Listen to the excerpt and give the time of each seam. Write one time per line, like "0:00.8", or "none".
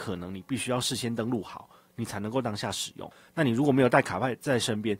none